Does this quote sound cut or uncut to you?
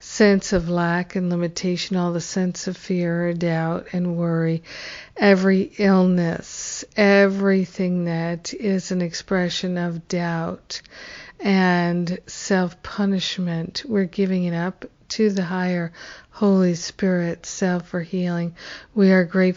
uncut